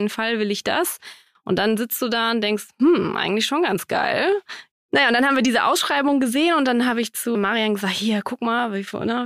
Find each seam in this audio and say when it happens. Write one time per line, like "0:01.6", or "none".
0:04.7
0:07.3